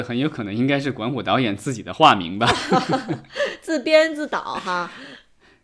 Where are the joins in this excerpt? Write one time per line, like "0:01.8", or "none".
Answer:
none